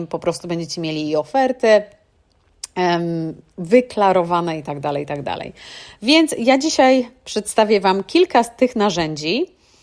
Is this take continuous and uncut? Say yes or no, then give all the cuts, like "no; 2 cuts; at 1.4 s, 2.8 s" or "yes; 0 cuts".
yes; 0 cuts